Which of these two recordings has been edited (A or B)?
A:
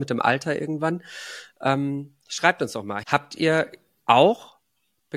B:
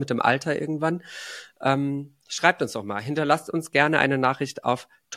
A